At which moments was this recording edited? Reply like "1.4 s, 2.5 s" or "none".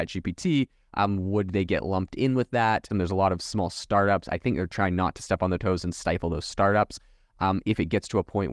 2.9 s